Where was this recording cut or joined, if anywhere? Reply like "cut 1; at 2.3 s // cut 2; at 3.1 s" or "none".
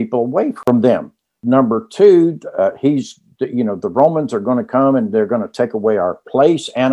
none